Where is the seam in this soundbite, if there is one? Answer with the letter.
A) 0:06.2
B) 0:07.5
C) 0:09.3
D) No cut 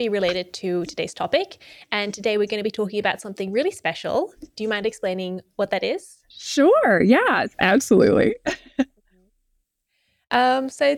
B